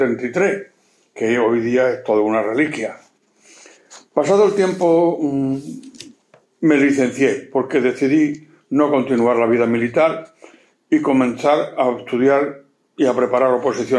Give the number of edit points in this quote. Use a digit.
0